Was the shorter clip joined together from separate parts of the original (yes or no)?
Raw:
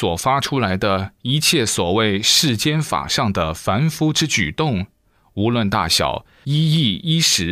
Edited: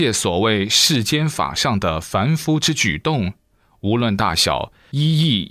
no